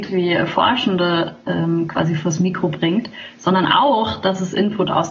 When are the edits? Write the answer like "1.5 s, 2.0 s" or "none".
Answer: none